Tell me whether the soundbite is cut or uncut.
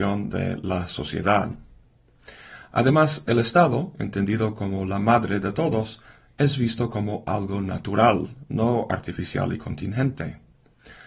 uncut